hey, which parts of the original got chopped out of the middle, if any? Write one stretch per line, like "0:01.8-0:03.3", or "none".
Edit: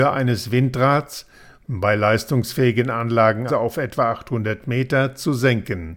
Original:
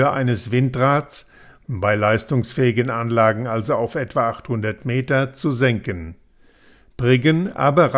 0:03.5-0:03.7

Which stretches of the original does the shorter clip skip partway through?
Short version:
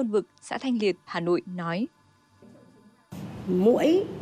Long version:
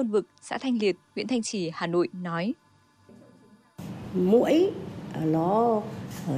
0:01.1-0:01.7

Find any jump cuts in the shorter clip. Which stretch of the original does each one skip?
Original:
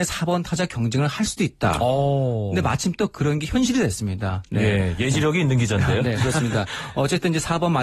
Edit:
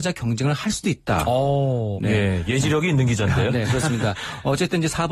0:02.5-0:04.5

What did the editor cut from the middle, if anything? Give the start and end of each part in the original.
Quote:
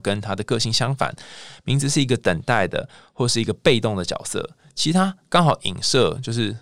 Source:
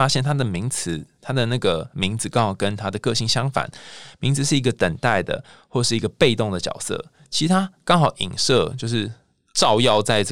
none

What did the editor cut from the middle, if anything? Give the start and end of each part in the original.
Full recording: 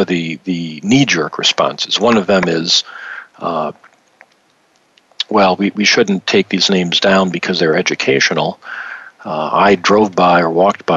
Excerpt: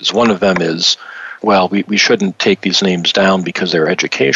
0:03.3-0:05.3

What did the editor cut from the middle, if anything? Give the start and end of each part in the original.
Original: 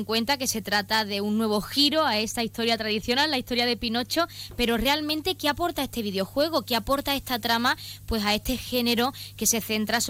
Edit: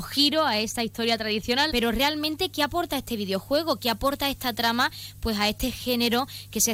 0:03.3-0:04.6

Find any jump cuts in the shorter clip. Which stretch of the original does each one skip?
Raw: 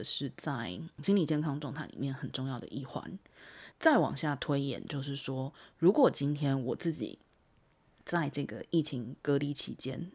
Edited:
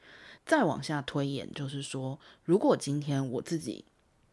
none

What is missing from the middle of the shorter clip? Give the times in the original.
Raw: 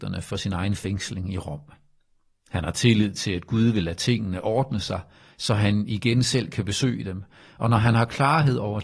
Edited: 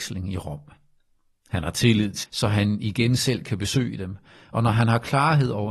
0:03.2-0:05.3

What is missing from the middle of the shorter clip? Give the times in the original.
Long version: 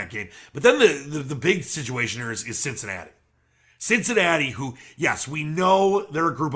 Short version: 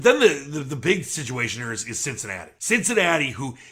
0:03.1-0:03.8

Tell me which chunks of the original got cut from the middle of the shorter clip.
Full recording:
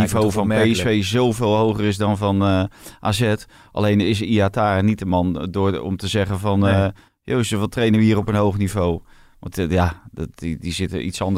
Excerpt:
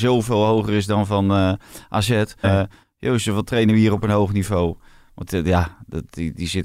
0:03.5-0:06.7

